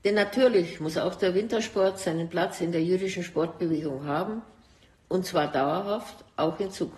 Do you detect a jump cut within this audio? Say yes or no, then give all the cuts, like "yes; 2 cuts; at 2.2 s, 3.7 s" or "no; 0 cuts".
no; 0 cuts